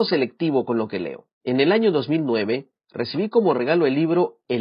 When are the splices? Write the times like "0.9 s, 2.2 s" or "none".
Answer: 1.3 s